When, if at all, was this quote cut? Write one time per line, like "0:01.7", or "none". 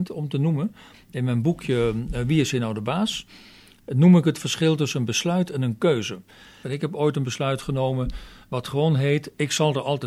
0:06.6